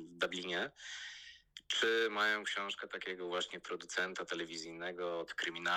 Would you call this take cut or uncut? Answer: uncut